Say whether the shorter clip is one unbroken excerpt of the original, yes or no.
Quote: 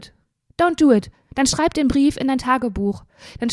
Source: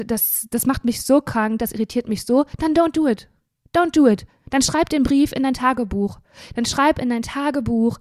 yes